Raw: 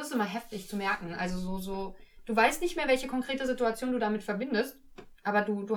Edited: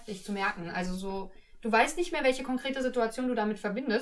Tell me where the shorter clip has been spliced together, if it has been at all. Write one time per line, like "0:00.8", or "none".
0:01.0